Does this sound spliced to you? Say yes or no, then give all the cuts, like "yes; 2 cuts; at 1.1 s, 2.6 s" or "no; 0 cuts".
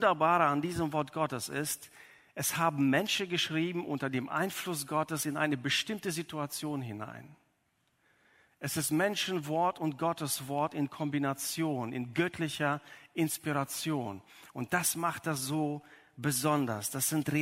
no; 0 cuts